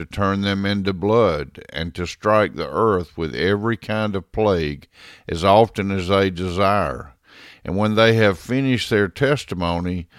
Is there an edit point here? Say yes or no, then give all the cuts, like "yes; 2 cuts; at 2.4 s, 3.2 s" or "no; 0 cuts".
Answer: no; 0 cuts